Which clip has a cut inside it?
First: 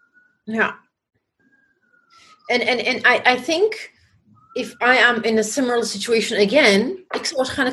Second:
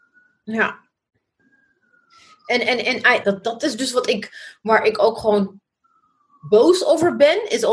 second; 1 cut; at 3.2 s

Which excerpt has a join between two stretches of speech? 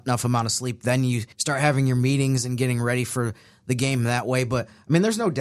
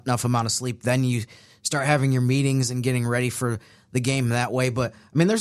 first; 1 cut; at 1.3 s

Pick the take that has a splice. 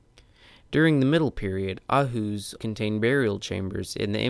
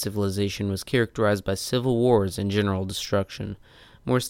first; 1 cut; at 2.6 s

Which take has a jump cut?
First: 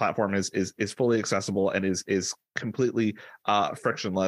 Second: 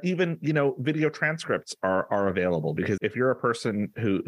second; 1 cut; at 3.0 s

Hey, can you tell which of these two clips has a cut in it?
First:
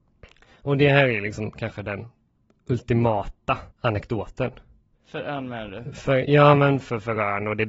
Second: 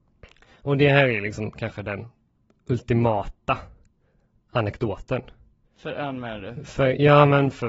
first; 1 cut; at 3.7 s

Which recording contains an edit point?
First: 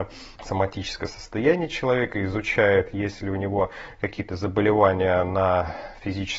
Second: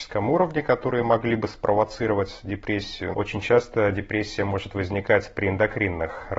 second; 1 cut; at 3.1 s

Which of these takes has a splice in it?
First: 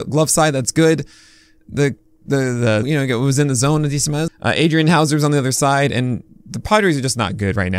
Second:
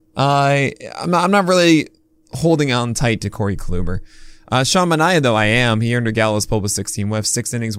first; 2 cuts; at 2.8 s, 4.3 s

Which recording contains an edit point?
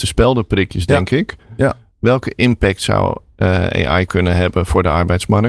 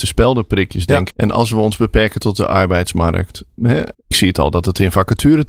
second; 2 cuts; at 1.1 s, 3.9 s

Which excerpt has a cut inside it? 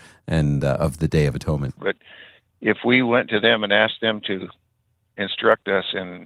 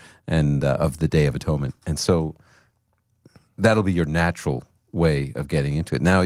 first; 1 cut; at 1.8 s

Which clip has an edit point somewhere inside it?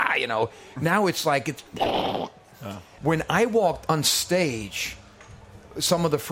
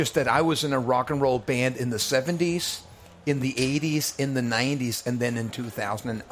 first; 1 cut; at 3.0 s

